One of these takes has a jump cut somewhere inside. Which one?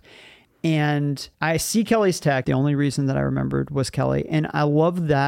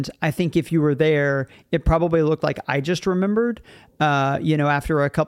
first; 2 cuts; at 1.3 s, 2.4 s

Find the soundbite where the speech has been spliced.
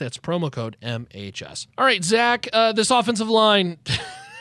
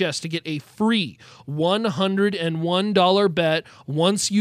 first; 1 cut; at 1.7 s

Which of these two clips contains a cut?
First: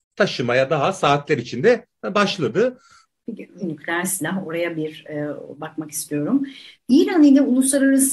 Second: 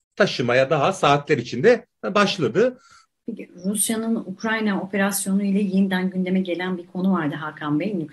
first; 2 cuts; at 3.6 s, 6.7 s

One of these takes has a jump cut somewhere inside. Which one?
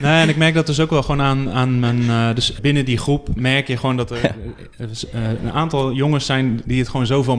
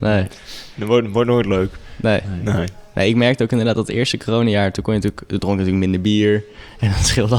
first; 1 cut; at 2.6 s

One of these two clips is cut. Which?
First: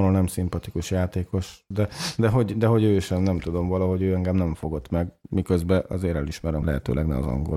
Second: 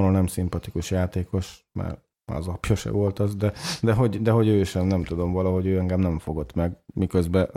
first; 2 cuts; at 1.7 s, 6.6 s

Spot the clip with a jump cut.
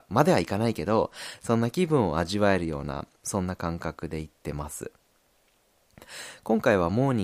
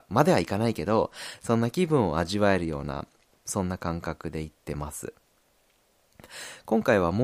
first; 1 cut; at 3.2 s

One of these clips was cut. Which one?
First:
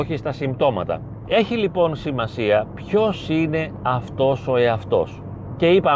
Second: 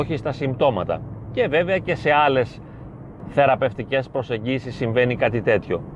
first; 1 cut; at 1.2 s

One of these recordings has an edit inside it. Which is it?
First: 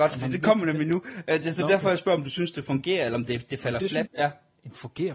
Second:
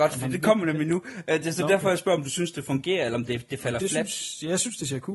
first; 1 cut; at 4.1 s

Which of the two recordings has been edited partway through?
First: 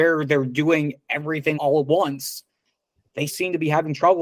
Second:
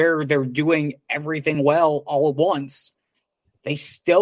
first; 2 cuts; at 1.5 s, 3.3 s

